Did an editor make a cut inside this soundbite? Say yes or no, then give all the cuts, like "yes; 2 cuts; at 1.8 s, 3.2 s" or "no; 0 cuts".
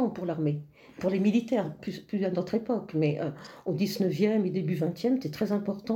yes; 1 cut; at 1.8 s